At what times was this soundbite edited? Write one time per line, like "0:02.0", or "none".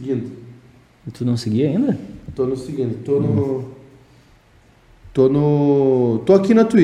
none